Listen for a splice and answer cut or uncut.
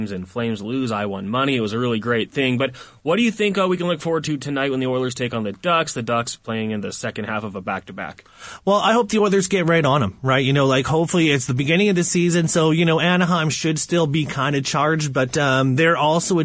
uncut